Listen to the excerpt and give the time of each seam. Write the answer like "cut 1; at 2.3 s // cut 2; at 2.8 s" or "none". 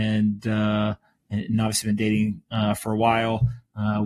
none